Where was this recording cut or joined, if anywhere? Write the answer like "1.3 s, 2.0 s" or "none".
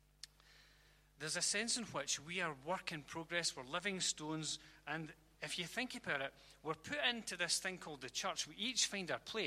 none